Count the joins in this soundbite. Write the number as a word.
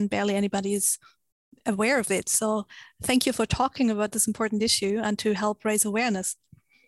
zero